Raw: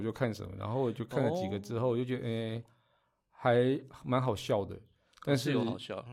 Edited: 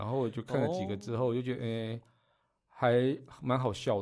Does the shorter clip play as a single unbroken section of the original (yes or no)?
yes